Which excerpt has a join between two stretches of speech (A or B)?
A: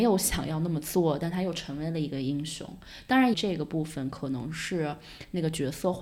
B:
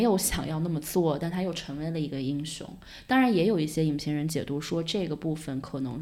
A